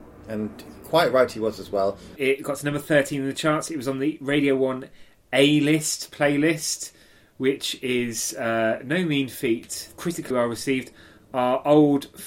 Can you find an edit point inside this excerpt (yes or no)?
yes